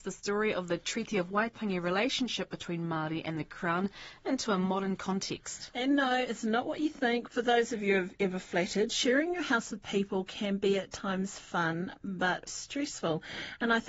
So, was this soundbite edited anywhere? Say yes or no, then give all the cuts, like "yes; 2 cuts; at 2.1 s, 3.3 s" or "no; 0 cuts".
yes; 2 cuts; at 7.3 s, 12.5 s